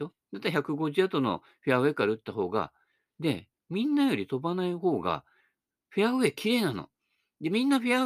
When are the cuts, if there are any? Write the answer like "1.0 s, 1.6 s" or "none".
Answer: none